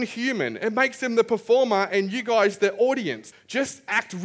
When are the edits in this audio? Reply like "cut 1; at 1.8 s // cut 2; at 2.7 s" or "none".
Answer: cut 1; at 3.3 s